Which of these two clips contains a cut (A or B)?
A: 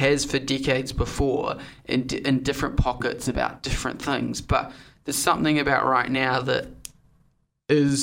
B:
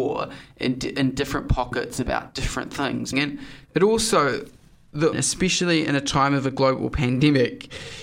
B